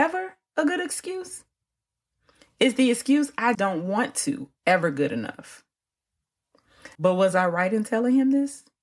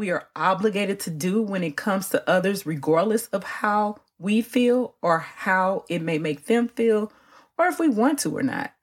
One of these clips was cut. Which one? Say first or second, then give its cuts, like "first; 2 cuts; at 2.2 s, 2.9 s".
first; 2 cuts; at 3.5 s, 6.9 s